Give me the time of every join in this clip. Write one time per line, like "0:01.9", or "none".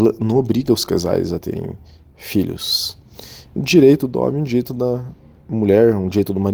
0:03.6